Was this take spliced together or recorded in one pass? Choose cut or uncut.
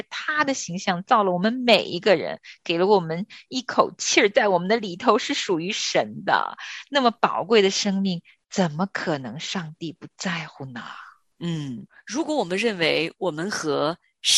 uncut